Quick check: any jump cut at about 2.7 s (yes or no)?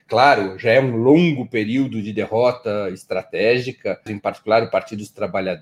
no